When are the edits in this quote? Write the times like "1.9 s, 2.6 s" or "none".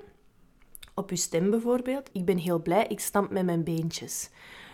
2.1 s